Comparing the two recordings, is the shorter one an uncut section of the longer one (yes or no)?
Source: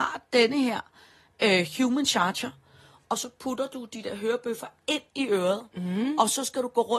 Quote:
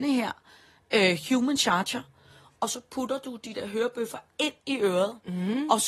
yes